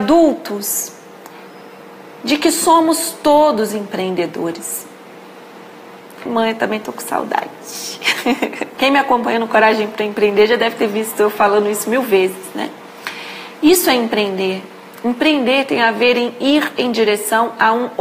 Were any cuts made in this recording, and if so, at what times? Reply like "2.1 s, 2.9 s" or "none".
6.3 s, 8.7 s